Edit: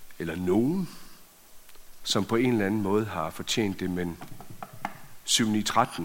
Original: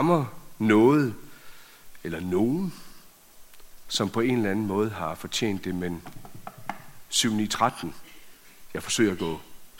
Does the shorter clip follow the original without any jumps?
yes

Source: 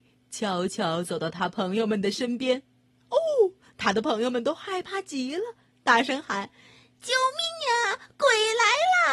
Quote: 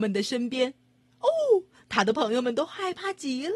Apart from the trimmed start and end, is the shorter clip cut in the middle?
no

